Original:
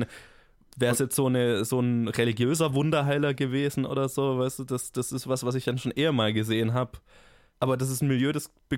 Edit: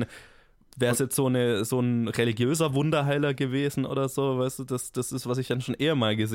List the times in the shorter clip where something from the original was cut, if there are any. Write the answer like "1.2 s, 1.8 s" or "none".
5.2 s